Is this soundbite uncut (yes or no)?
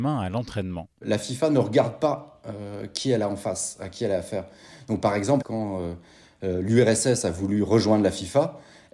no